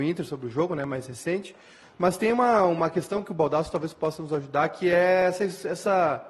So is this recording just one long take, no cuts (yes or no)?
yes